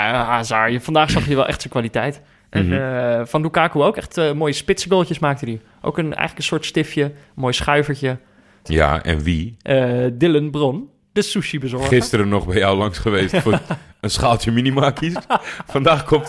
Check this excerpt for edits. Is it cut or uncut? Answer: cut